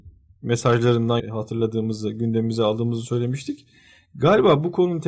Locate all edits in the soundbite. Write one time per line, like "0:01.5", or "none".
0:01.2